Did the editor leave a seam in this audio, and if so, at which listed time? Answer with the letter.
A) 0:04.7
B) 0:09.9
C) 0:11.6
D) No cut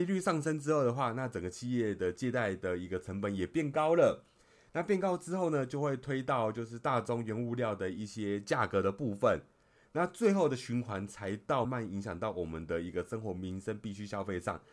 C